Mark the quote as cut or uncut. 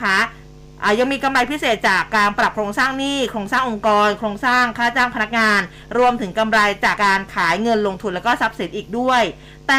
cut